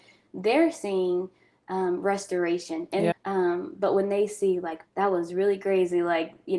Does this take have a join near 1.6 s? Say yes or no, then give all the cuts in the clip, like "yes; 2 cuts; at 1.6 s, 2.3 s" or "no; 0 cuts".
no; 2 cuts; at 3.1 s, 4.8 s